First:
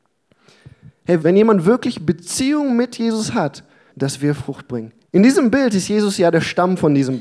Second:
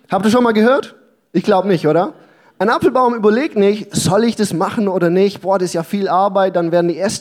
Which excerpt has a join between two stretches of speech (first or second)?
first